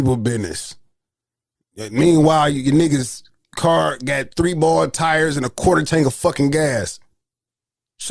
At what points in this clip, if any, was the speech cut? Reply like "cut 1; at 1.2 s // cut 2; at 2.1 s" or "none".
none